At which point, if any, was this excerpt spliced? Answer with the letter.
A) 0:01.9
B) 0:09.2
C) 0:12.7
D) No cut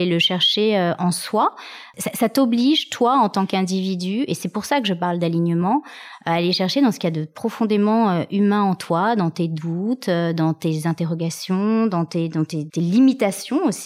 C